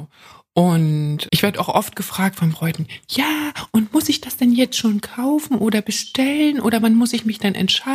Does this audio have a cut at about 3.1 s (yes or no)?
no